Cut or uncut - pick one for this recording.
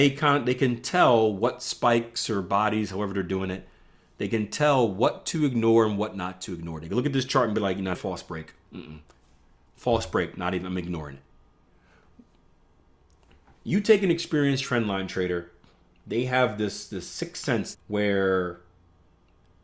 cut